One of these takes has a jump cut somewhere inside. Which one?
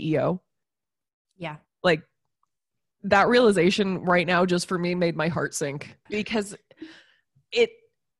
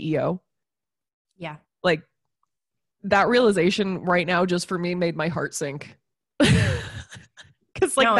first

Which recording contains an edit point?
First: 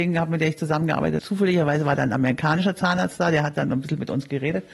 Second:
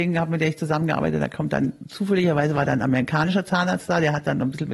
first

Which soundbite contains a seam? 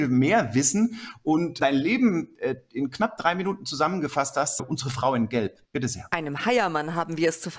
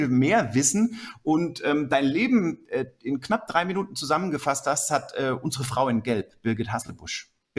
first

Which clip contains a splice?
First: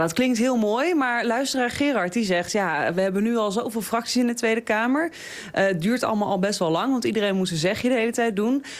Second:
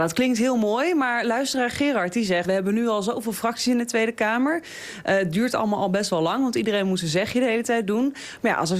second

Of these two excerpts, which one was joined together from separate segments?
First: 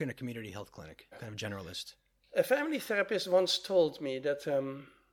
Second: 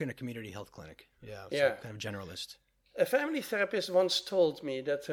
first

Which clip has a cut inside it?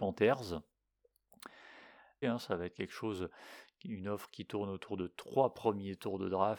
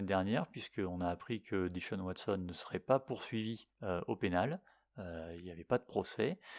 first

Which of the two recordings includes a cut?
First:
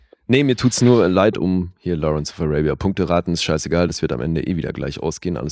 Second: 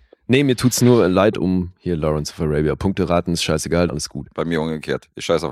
second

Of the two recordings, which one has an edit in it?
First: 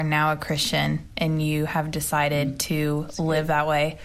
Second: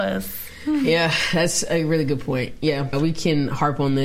second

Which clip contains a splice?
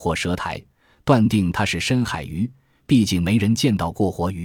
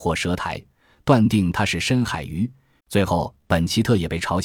second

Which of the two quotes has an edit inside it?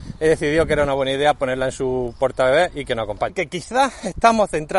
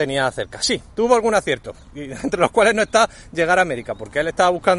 first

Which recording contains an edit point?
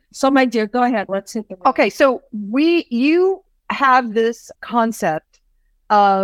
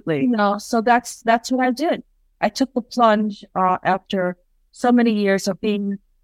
first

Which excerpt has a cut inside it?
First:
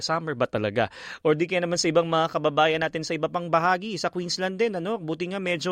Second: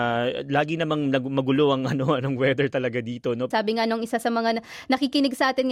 second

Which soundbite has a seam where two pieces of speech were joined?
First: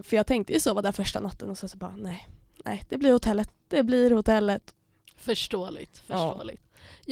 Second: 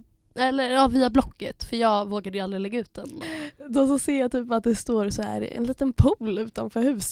second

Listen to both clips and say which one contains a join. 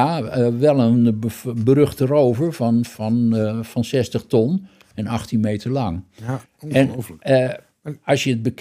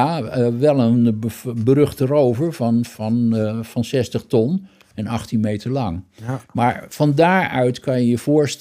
first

